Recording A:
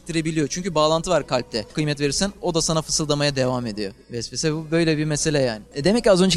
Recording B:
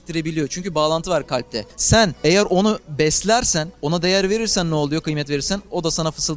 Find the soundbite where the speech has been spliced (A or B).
A